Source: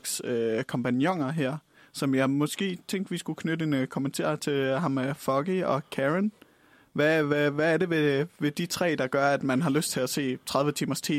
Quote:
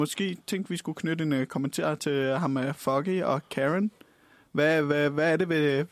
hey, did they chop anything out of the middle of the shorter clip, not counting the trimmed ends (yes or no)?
no